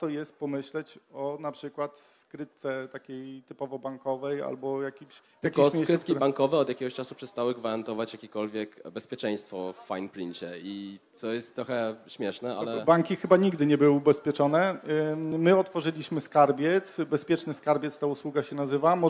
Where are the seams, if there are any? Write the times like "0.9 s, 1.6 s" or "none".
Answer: none